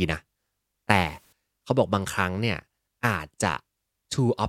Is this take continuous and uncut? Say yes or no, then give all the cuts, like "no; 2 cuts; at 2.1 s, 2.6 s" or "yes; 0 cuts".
yes; 0 cuts